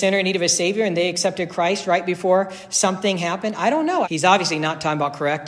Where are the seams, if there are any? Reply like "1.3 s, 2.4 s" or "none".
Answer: 4.0 s

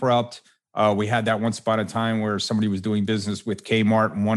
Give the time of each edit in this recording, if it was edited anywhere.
none

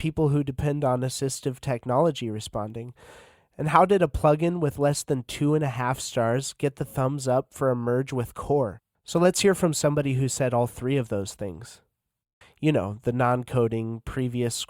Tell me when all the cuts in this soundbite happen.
8.9 s, 12.4 s

